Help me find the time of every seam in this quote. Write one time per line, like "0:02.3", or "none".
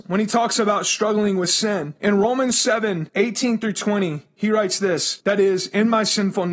0:05.2